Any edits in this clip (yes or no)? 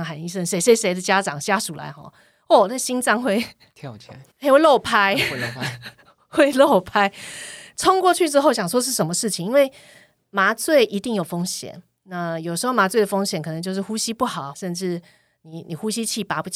yes